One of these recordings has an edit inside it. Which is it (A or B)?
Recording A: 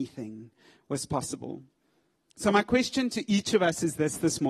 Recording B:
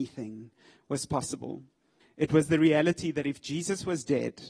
B